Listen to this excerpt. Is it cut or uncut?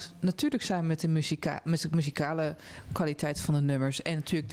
uncut